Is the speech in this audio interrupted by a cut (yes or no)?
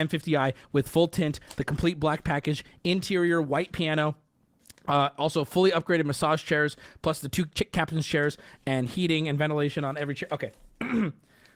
no